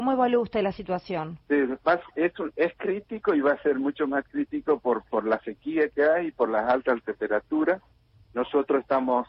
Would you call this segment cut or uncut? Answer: uncut